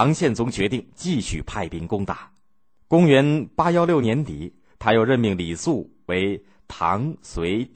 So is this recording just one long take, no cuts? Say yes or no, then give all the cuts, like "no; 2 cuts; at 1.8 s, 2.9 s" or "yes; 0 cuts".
no; 1 cut; at 4.0 s